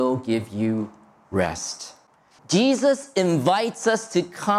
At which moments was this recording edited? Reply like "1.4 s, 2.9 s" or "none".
2.4 s